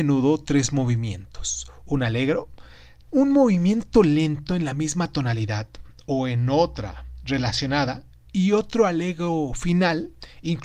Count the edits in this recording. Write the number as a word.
one